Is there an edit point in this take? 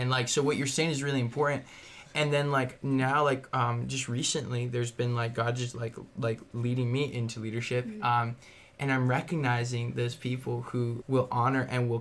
yes; 1 cut; at 11.0 s

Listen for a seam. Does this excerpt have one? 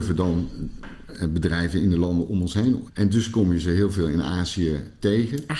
yes; 1 cut; at 2.9 s

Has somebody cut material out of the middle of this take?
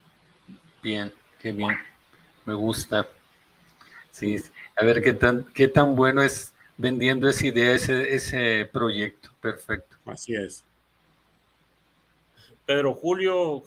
no; 0 cuts

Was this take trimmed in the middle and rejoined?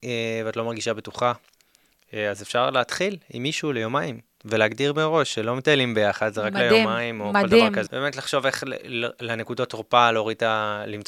yes; 1 cut; at 7.9 s

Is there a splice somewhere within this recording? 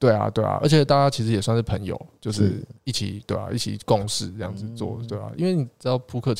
no; 0 cuts

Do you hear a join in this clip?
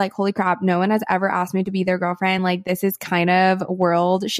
no; 0 cuts

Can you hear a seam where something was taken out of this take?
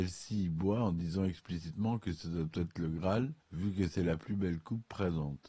yes; 1 cut; at 3.4 s

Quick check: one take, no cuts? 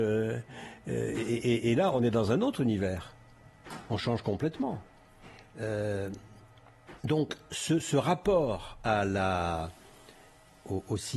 yes; 0 cuts

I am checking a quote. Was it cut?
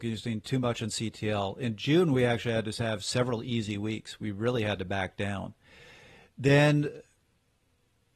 no; 0 cuts

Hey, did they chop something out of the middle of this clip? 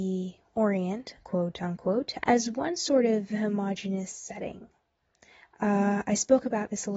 yes; 1 cut; at 2.2 s

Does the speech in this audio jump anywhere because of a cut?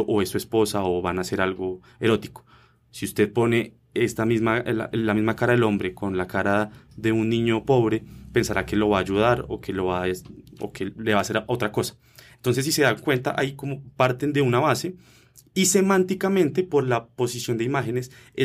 no; 0 cuts

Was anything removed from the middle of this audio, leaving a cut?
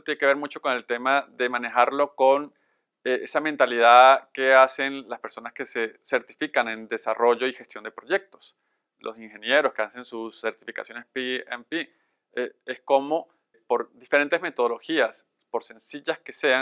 yes; 1 cut; at 13.5 s

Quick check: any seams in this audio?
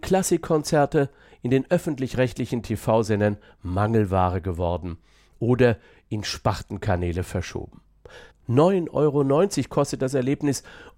yes; 1 cut; at 8.3 s

